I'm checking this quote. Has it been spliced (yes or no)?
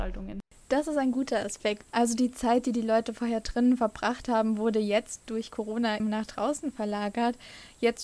yes